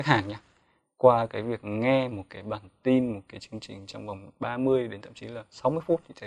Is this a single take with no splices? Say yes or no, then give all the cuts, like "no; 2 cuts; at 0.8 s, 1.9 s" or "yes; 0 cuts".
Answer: yes; 0 cuts